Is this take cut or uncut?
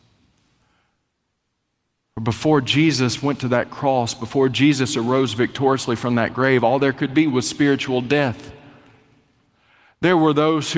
uncut